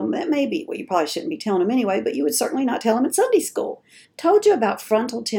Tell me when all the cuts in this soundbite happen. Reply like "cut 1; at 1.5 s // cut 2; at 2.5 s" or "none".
cut 1; at 4.0 s